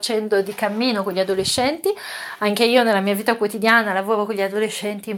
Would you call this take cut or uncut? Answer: uncut